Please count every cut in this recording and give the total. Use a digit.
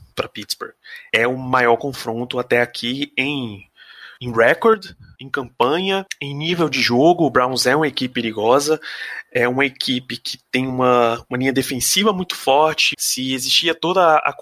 2